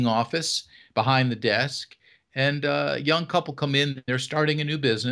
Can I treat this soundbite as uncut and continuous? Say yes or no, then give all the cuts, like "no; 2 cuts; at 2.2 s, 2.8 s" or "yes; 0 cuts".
yes; 0 cuts